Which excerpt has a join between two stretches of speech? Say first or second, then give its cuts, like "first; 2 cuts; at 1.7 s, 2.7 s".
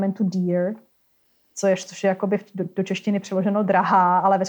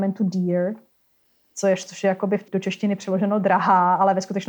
second; 1 cut; at 2.5 s